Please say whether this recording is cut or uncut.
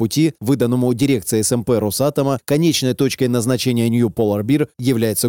cut